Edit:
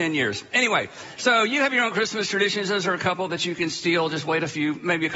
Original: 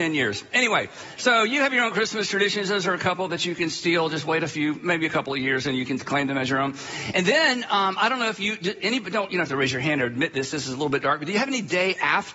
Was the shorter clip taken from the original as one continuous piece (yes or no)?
yes